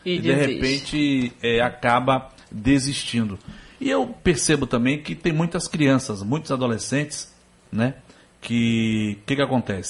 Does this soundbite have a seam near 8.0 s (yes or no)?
no